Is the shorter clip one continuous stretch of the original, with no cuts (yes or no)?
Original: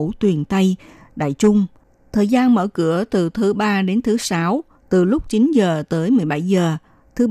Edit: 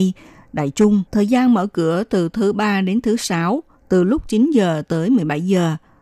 no